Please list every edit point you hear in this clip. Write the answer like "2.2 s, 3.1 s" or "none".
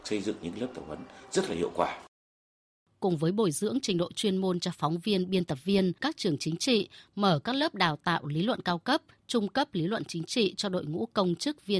6.0 s